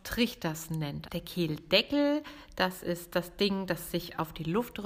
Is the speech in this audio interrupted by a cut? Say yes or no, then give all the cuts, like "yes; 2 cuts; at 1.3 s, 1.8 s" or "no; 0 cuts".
yes; 1 cut; at 1.1 s